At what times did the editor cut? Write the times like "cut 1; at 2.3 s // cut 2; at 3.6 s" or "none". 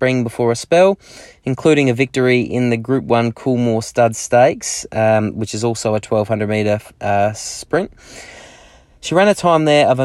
none